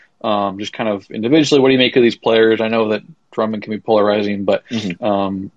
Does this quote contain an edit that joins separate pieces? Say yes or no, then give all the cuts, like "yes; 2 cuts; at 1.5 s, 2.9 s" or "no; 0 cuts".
no; 0 cuts